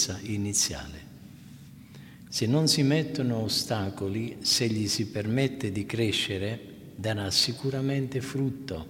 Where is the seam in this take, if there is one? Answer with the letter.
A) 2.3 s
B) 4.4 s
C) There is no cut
A